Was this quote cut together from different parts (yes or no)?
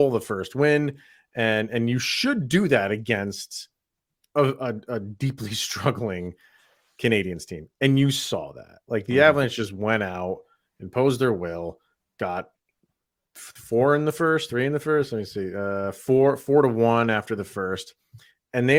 no